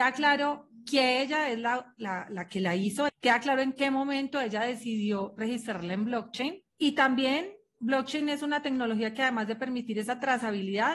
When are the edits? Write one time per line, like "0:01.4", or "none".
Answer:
0:03.1
0:06.7